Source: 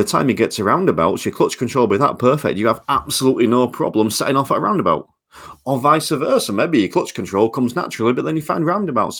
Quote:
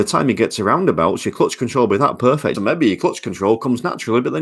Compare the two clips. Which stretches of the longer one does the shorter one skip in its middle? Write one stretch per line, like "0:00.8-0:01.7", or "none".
0:02.5-0:06.5